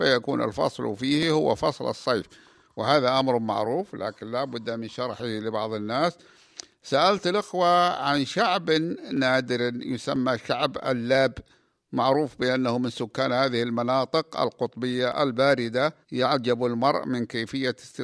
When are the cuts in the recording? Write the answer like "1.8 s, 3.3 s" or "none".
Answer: 16.0 s